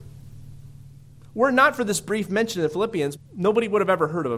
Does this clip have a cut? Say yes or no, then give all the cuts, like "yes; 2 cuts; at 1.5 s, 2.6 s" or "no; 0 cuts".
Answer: yes; 1 cut; at 3.2 s